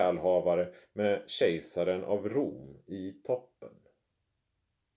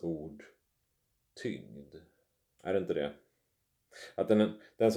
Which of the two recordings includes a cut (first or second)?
second